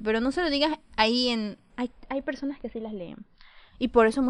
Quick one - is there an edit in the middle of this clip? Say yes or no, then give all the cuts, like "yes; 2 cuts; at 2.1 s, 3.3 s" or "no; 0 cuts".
yes; 1 cut; at 1.7 s